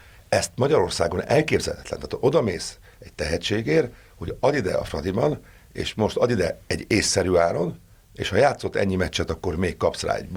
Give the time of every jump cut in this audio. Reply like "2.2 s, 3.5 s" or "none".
none

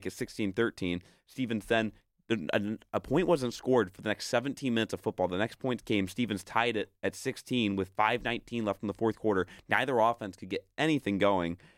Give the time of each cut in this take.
none

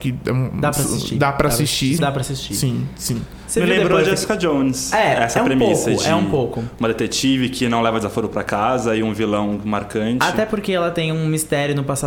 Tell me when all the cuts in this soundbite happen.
2.0 s

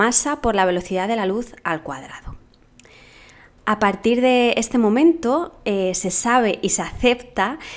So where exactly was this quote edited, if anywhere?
none

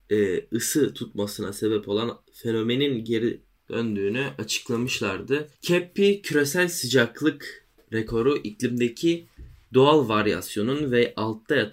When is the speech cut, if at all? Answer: 5.5 s

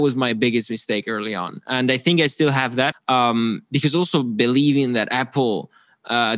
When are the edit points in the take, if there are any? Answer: 2.9 s

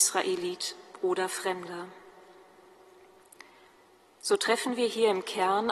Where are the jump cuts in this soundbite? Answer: none

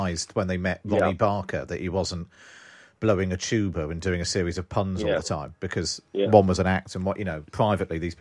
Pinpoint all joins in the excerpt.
none

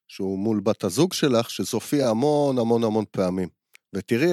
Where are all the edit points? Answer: none

